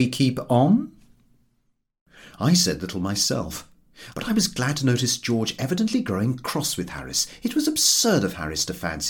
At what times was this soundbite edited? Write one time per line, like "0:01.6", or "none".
0:04.1